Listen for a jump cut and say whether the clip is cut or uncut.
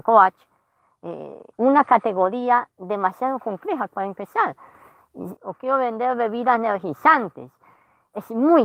cut